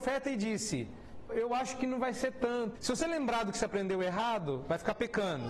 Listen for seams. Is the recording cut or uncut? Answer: cut